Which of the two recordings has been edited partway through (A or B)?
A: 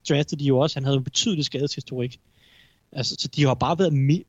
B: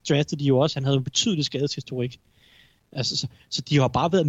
A